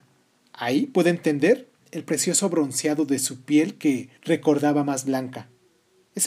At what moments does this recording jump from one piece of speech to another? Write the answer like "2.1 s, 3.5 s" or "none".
4.2 s